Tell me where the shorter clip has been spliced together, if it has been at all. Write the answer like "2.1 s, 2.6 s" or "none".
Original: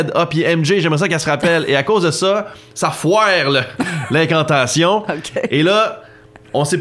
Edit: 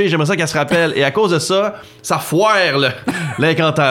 none